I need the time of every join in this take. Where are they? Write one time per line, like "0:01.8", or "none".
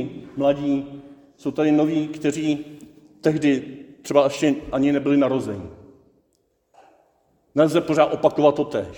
none